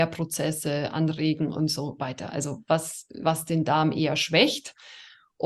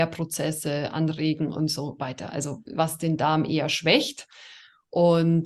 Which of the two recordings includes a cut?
second; 1 cut; at 2.6 s

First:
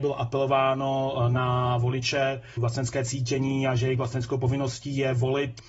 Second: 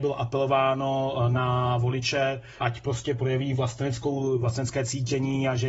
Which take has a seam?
first; 1 cut; at 2.6 s

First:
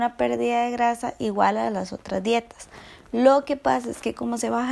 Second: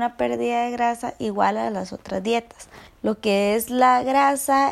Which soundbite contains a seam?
second; 1 cut; at 2.9 s

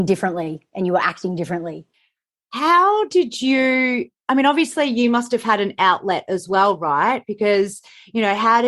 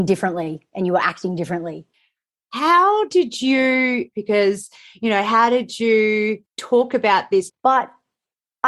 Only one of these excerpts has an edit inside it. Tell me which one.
second; 3 cuts; at 4.1 s, 6.5 s, 7.5 s

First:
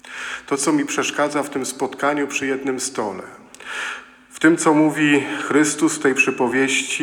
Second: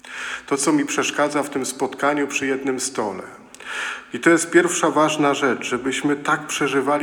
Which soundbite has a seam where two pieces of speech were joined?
second; 1 cut; at 4.1 s

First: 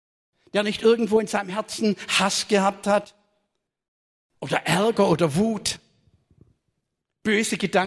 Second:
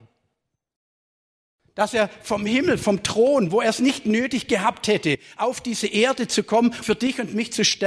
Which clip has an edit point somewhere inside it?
second; 1 cut; at 6.8 s

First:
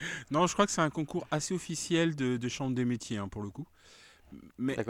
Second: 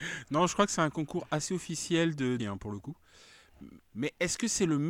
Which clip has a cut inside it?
second; 2 cuts; at 2.4 s, 3.8 s

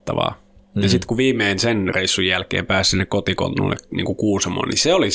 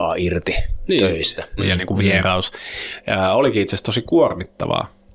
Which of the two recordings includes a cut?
second; 1 cut; at 1.6 s

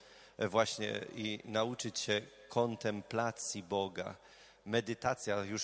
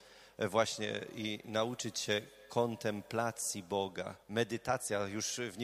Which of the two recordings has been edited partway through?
second; 1 cut; at 4.2 s

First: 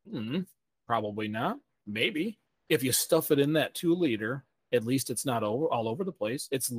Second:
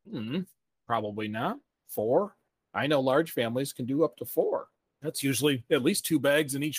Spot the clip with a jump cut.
second; 1 cut; at 1.7 s

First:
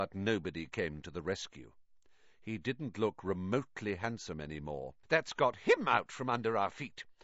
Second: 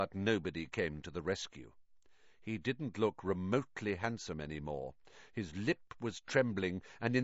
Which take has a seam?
first; 1 cut; at 5.0 s

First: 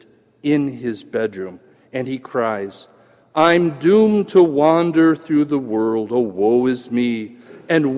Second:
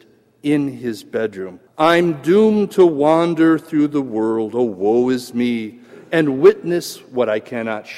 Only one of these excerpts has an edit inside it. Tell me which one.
second; 1 cut; at 1.7 s

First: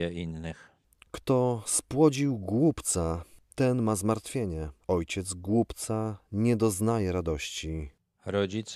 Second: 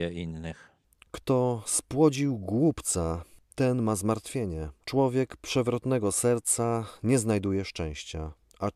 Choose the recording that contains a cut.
second; 1 cut; at 4.8 s

